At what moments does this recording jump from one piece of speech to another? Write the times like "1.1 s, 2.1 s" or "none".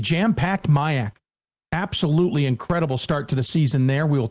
none